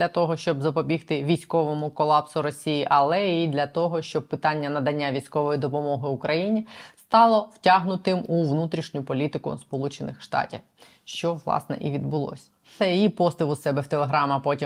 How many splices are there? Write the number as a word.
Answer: one